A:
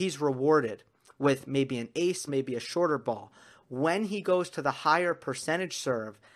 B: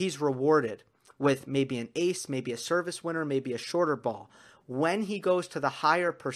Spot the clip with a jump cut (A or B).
A